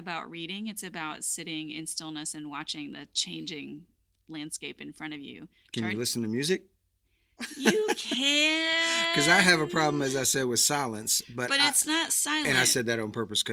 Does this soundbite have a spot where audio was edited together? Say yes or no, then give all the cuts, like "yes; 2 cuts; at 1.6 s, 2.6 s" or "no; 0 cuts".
no; 0 cuts